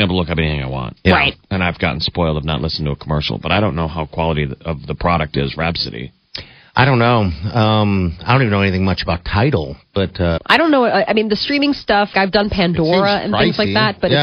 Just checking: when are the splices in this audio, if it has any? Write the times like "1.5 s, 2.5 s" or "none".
10.4 s, 12.1 s